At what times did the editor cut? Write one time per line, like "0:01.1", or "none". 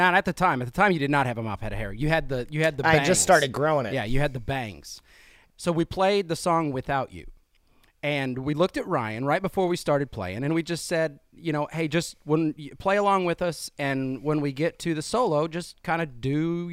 0:05.5